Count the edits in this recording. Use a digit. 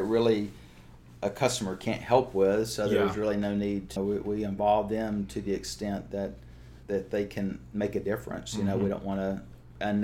2